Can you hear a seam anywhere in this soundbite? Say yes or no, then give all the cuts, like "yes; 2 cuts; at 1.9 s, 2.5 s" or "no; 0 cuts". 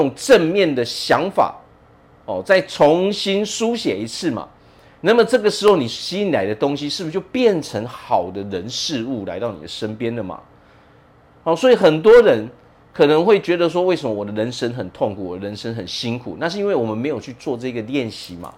no; 0 cuts